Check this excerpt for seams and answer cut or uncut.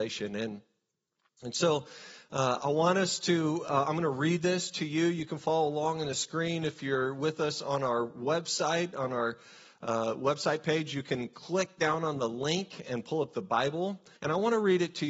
cut